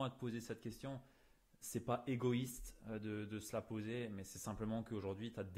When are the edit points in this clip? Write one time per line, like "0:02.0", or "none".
none